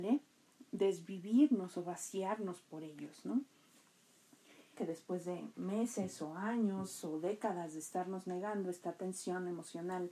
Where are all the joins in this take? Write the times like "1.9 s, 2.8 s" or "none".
4.7 s